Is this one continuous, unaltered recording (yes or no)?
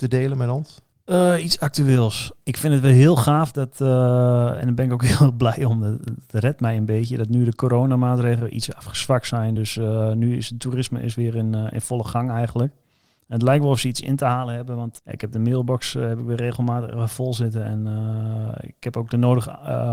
yes